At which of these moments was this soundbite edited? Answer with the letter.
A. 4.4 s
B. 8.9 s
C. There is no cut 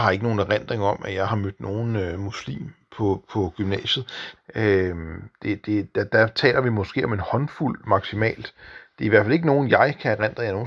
A